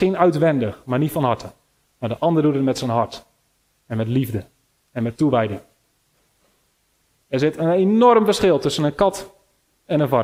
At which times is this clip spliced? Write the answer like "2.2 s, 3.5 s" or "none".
7.2 s